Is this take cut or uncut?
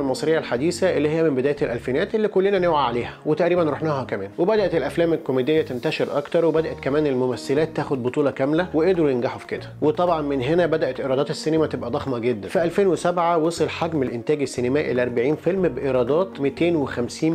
uncut